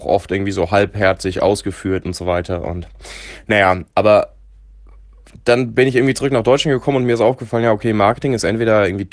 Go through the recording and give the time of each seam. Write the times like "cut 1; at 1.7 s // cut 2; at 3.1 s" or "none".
none